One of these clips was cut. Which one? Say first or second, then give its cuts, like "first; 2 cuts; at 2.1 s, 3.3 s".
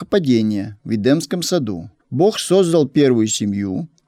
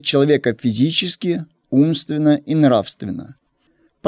first; 1 cut; at 2.0 s